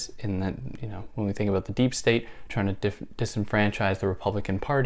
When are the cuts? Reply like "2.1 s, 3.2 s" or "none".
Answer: 2.5 s